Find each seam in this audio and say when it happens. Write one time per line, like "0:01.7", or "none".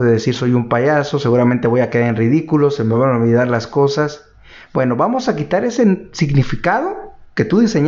none